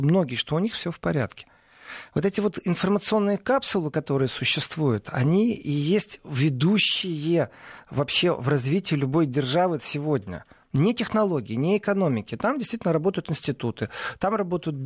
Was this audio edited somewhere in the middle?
no; 0 cuts

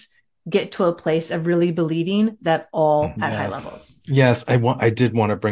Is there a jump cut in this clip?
yes; 1 cut; at 3.2 s

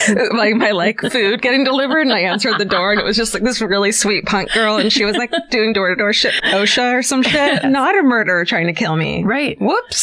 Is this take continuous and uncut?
no; 2 cuts; at 6.4 s, 7.6 s

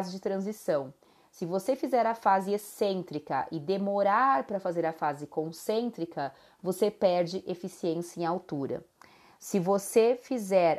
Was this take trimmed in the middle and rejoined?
no; 0 cuts

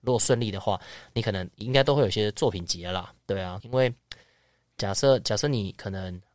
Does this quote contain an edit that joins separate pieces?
yes; 1 cut; at 3.6 s

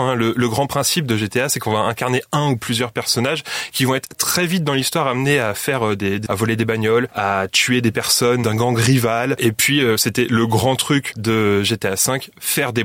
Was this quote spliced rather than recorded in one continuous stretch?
yes; 1 cut; at 6.3 s

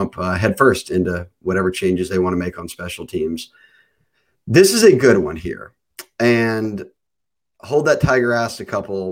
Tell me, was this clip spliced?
no; 0 cuts

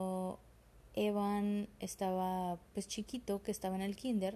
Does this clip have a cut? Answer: no; 0 cuts

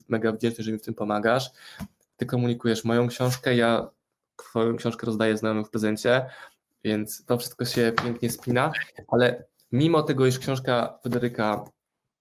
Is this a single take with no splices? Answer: yes; 0 cuts

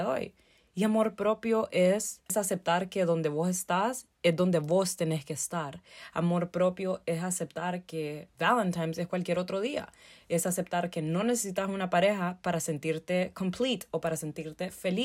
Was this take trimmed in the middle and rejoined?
no; 0 cuts

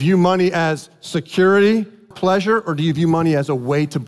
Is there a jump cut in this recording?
yes; 1 cut; at 2.1 s

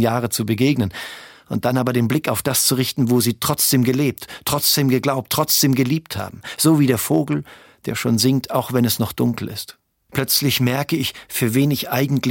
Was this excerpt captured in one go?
no; 1 cut; at 10.1 s

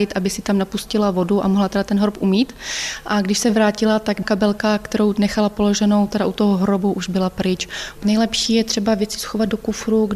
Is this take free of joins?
no; 1 cut; at 8.0 s

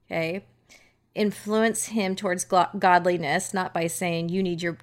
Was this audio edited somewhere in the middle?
no; 0 cuts

